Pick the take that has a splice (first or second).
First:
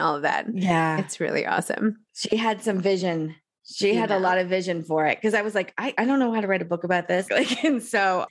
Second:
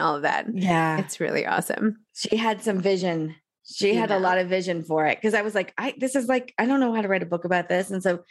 first